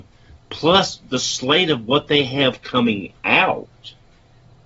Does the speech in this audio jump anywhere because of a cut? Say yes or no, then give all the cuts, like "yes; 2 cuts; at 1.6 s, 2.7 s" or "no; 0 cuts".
no; 0 cuts